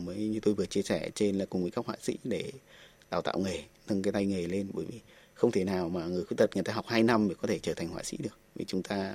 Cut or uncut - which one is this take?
cut